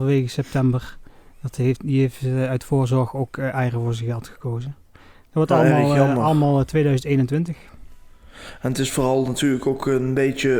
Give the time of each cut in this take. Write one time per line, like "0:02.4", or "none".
none